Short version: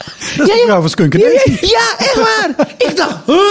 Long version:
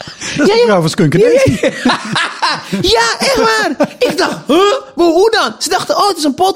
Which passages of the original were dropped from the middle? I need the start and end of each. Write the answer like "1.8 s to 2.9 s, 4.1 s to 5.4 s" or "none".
1.6 s to 2.8 s